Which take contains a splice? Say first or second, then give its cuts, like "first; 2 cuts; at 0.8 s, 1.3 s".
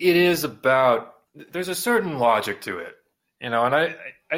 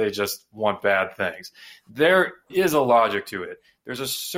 first; 1 cut; at 1.3 s